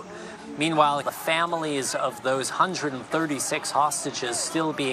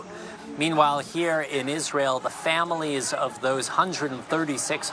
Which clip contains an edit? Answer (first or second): first